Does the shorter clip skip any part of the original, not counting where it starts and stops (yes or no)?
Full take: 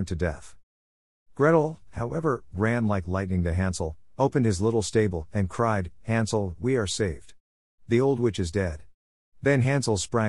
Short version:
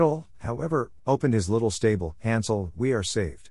yes